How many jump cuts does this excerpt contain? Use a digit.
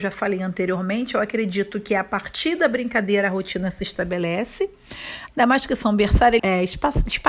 2